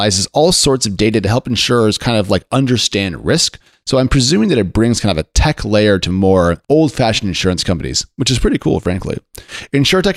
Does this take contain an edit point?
yes; 1 cut; at 6.6 s

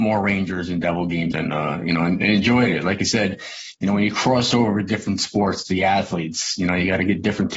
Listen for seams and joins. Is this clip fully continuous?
no; 1 cut; at 1.3 s

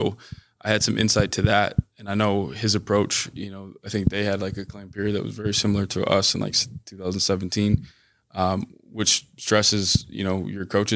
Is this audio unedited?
yes; 0 cuts

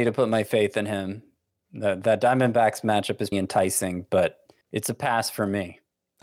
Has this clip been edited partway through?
yes; 2 cuts; at 3.3 s, 4.6 s

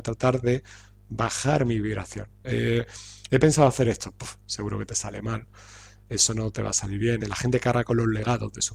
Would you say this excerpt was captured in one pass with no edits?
no; 2 cuts; at 2.4 s, 7.2 s

